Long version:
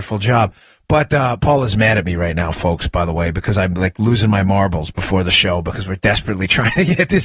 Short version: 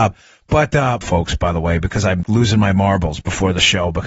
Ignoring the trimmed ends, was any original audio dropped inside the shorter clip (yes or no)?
yes